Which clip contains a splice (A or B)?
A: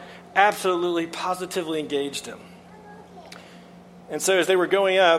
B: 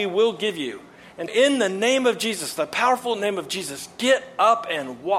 B